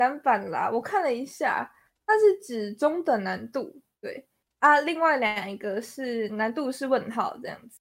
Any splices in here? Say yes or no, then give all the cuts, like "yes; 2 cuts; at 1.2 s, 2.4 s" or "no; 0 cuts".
no; 0 cuts